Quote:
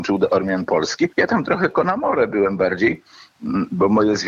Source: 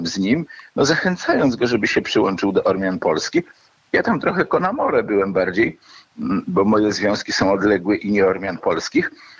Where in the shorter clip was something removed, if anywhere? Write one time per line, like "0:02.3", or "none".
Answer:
0:01.1

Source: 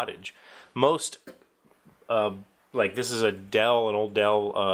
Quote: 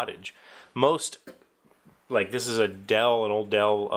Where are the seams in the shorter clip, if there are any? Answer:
0:02.0

